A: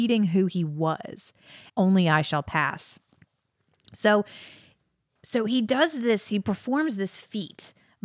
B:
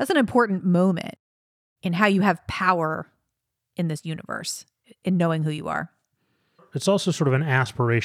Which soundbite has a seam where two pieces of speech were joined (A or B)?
A